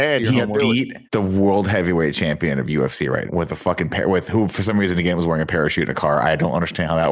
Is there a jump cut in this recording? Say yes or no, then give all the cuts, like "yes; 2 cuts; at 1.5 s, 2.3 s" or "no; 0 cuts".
yes; 2 cuts; at 1.1 s, 3.3 s